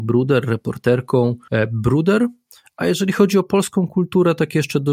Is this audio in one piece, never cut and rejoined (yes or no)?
no